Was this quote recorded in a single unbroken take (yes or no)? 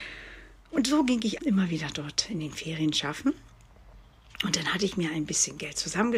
no